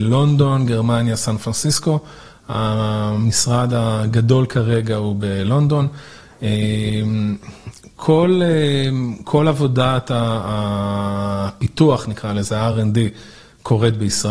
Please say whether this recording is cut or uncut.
uncut